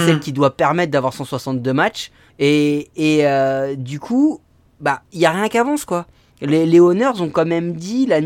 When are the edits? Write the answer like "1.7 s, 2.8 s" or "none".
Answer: 2.3 s